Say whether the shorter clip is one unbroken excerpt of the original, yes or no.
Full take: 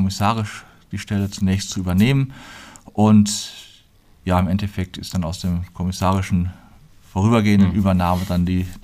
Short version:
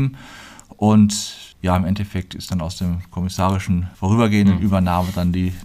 no